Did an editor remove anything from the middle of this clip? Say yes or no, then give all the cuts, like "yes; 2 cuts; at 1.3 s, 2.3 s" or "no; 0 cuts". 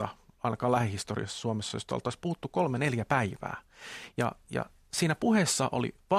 no; 0 cuts